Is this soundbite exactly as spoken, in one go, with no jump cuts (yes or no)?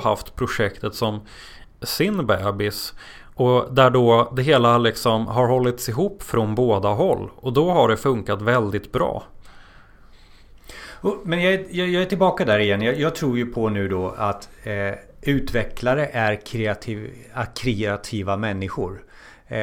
yes